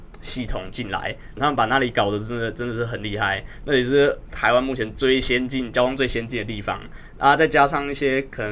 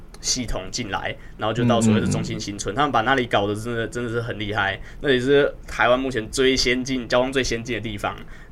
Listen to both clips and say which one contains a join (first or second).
first